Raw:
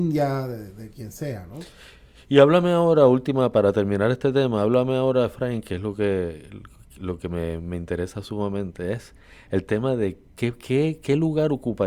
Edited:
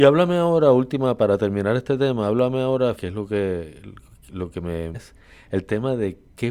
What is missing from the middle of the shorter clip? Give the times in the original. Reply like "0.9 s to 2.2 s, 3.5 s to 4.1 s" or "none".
5.3 s to 5.6 s, 7.6 s to 8.9 s